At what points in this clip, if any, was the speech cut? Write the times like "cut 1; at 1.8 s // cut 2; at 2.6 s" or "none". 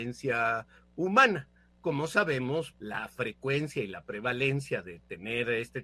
cut 1; at 2.7 s